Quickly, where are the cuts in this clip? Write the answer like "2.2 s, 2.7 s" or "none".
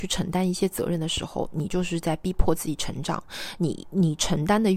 none